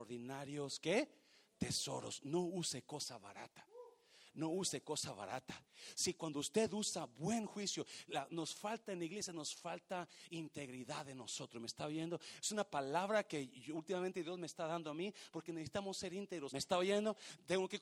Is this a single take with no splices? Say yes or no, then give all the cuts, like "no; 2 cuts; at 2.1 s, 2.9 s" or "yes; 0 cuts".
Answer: no; 1 cut; at 16.5 s